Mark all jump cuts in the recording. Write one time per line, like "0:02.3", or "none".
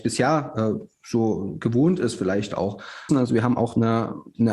0:03.1

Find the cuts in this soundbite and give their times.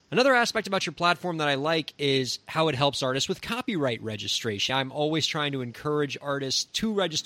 0:04.7

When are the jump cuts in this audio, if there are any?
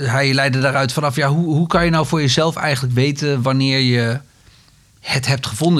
none

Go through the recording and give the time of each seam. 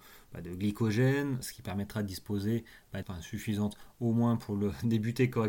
0:01.4
0:03.0

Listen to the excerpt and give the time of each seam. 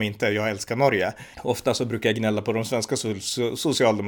0:01.3

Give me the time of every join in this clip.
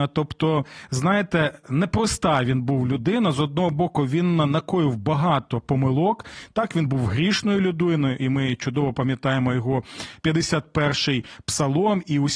none

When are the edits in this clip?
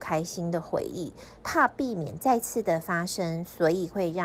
0:01.4

